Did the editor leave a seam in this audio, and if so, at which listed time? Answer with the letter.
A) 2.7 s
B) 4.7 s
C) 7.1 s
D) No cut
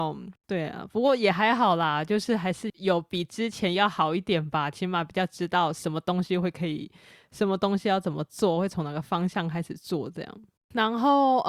A